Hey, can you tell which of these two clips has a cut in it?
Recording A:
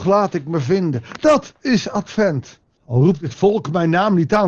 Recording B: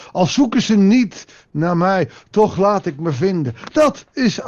A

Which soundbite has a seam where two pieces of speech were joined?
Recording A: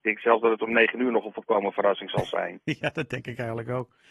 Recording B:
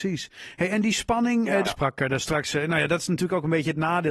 B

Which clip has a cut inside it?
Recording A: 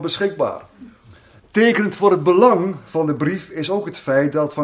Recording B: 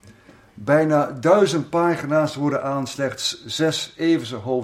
A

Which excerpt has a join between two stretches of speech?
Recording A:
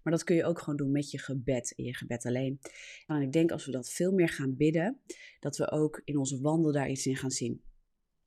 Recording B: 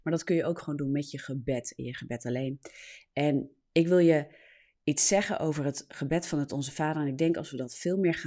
A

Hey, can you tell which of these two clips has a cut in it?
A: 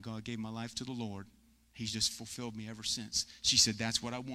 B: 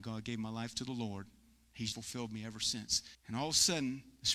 B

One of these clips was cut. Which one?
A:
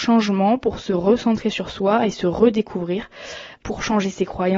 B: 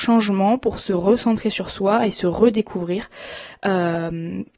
A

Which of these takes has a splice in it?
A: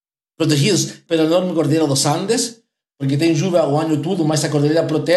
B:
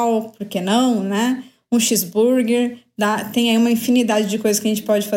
A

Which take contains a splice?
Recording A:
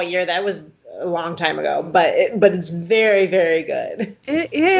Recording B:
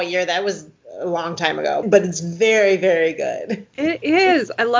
B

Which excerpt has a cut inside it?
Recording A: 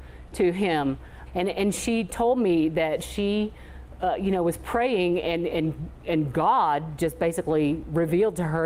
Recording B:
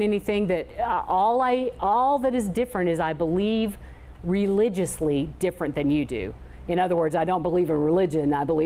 A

